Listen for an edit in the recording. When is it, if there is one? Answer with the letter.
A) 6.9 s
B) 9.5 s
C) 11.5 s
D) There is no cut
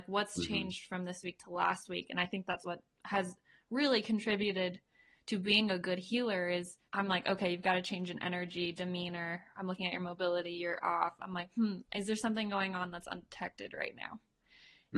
A